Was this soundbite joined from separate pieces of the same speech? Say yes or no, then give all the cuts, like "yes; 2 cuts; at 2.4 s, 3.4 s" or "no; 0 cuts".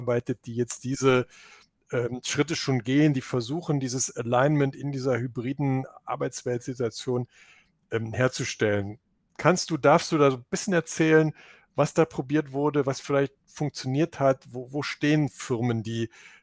no; 0 cuts